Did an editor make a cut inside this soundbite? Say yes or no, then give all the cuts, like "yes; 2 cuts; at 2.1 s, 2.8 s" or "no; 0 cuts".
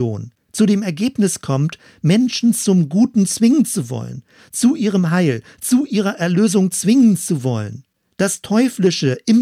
no; 0 cuts